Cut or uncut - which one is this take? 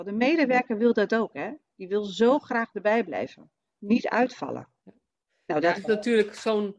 cut